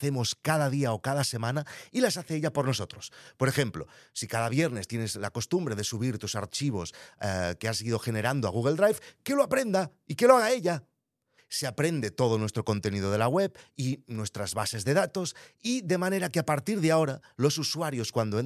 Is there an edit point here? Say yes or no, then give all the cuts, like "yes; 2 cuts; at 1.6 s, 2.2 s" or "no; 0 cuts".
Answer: yes; 1 cut; at 11.4 s